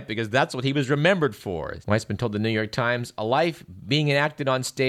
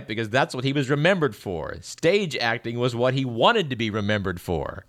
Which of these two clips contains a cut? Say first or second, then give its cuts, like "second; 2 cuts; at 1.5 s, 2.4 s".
first; 1 cut; at 1.8 s